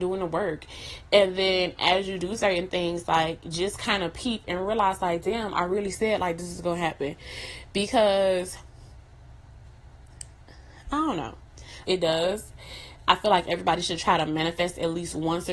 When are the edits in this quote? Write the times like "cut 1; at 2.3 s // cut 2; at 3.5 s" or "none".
cut 1; at 11.8 s